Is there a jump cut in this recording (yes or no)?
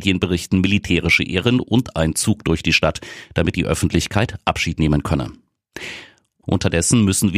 no